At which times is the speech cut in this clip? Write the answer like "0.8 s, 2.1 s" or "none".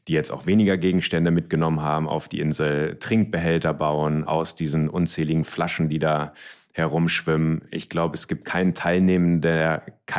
none